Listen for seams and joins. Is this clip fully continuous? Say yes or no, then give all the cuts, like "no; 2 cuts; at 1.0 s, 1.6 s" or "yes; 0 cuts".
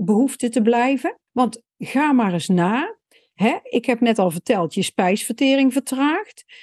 no; 1 cut; at 1.3 s